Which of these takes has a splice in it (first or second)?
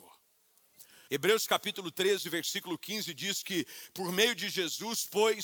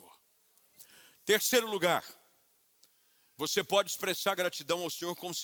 first